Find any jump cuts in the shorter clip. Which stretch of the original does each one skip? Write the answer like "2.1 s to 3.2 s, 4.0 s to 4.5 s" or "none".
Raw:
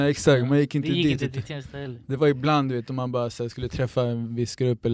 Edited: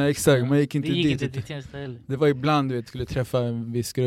2.9 s to 3.5 s